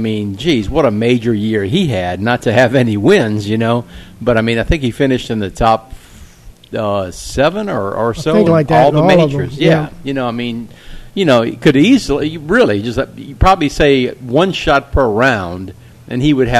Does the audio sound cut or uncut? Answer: cut